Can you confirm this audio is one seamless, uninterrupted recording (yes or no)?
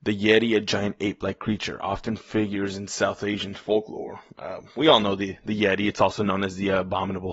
yes